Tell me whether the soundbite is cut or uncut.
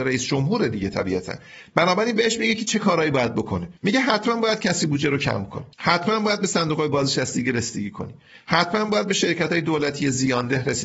cut